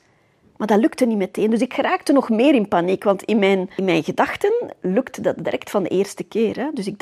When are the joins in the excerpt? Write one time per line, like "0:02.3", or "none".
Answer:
none